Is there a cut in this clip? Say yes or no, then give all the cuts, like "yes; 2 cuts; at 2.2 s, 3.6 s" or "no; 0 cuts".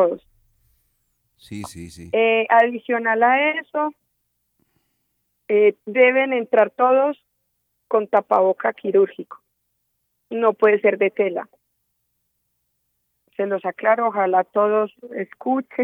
no; 0 cuts